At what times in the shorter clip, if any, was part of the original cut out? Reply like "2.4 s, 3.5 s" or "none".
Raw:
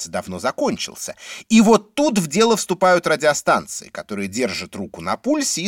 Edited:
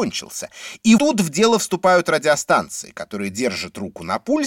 1.0 s